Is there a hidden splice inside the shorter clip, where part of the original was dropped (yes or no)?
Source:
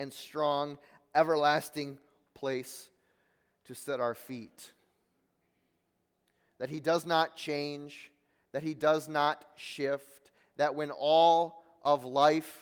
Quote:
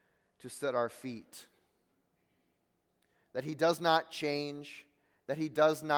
no